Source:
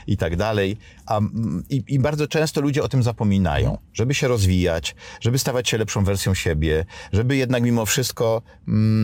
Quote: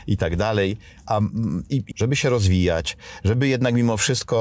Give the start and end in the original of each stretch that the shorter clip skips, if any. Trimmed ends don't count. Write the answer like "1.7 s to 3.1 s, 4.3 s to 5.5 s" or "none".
1.9 s to 3.9 s, 5.2 s to 7.1 s